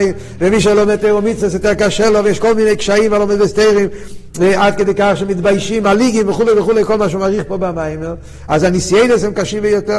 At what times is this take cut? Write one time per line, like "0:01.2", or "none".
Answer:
none